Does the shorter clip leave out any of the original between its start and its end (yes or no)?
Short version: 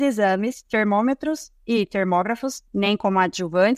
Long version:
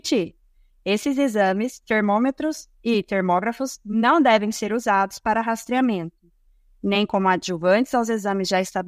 yes